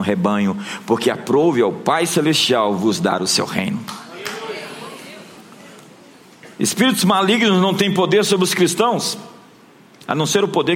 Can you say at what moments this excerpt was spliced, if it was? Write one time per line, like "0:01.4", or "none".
none